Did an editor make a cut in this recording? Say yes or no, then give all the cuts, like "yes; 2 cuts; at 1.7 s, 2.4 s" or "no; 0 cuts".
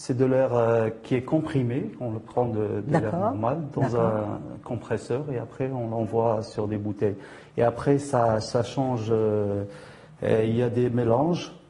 no; 0 cuts